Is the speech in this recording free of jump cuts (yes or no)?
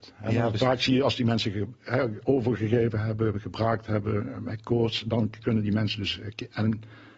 yes